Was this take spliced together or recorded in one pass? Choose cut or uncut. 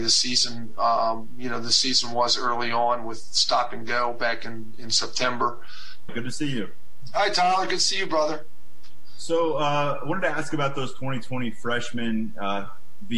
cut